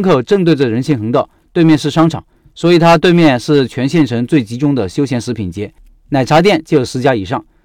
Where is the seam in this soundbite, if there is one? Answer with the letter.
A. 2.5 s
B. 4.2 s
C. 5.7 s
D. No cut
D